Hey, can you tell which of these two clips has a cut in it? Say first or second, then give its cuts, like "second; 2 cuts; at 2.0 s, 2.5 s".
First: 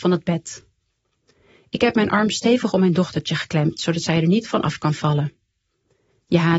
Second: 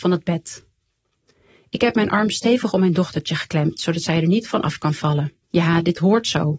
second; 1 cut; at 5.4 s